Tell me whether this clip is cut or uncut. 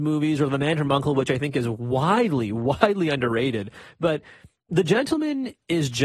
uncut